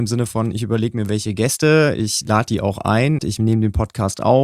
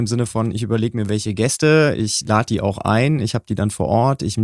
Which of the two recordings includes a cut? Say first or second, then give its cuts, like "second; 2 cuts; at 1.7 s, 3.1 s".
first; 1 cut; at 3.2 s